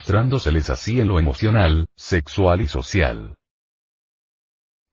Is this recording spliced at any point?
no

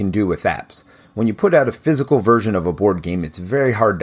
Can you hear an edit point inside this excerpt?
no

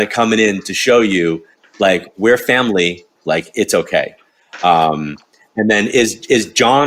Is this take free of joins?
no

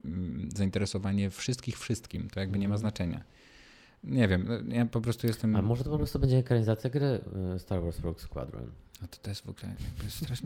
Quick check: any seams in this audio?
no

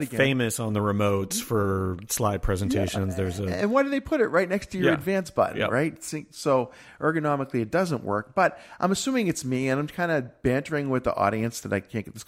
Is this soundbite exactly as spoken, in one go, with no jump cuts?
yes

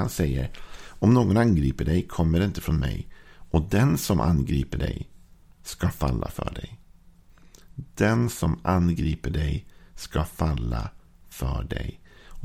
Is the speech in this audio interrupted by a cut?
no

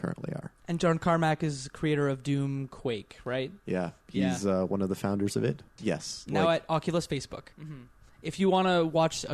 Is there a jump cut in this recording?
yes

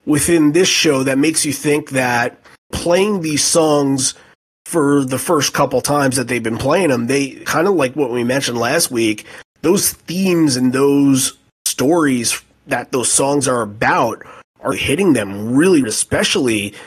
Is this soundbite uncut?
no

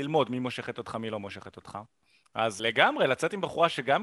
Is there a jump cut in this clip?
yes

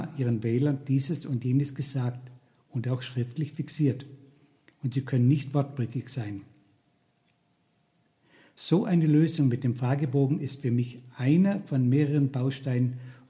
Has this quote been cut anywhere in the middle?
no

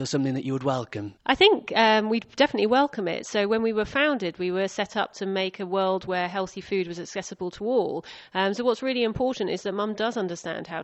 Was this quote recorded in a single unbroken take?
yes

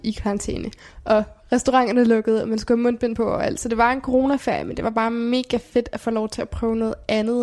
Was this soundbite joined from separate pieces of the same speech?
no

